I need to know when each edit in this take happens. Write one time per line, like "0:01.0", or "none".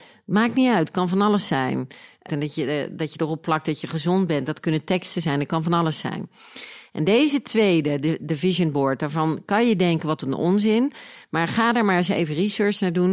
0:02.3